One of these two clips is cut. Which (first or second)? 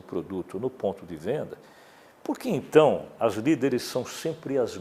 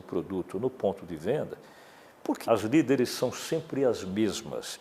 second